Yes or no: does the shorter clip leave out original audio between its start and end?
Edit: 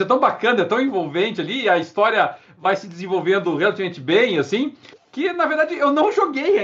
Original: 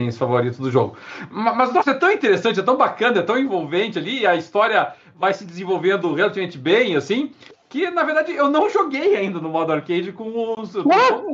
no